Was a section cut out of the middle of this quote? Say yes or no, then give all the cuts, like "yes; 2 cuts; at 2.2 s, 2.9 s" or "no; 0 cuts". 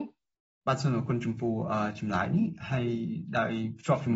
no; 0 cuts